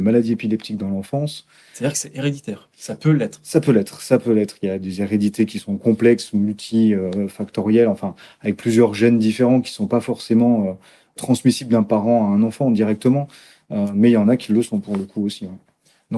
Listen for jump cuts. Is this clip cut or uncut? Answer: uncut